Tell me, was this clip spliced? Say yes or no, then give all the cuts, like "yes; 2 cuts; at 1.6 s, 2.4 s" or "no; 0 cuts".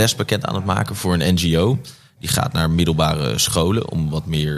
no; 0 cuts